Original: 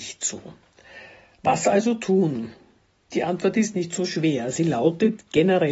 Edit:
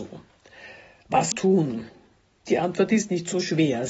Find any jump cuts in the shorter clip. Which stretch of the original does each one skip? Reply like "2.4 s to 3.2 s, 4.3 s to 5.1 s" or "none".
1.6 s to 2.0 s